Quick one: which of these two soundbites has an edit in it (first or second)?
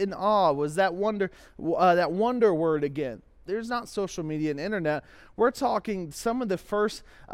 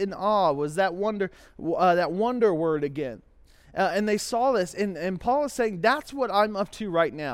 first